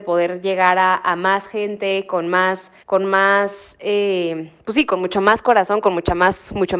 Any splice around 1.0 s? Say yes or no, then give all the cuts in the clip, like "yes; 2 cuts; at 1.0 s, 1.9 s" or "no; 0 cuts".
no; 1 cut; at 2.8 s